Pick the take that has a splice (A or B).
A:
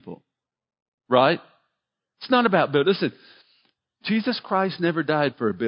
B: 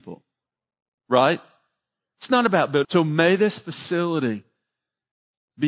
B